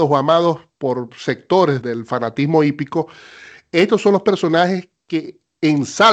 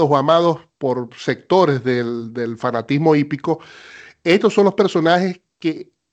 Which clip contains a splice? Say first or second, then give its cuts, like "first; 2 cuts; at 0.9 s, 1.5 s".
first; 1 cut; at 1.8 s